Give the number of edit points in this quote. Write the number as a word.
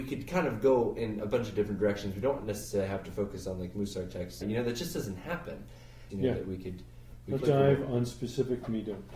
three